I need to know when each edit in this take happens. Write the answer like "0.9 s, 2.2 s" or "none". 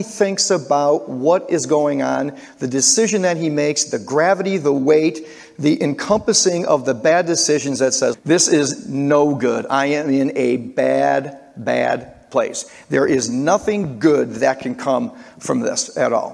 8.1 s